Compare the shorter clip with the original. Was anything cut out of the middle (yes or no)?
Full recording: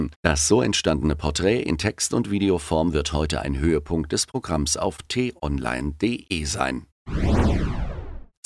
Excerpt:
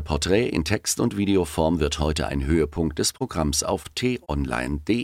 no